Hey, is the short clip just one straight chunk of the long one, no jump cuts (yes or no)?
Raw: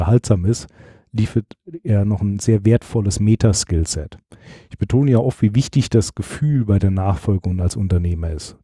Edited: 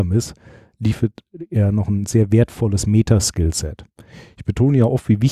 yes